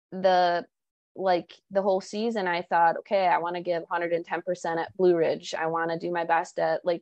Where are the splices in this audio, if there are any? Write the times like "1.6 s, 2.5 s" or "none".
none